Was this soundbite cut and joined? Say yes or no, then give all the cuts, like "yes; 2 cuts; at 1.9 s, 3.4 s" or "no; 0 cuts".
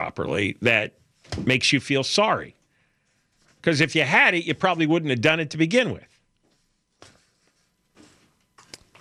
no; 0 cuts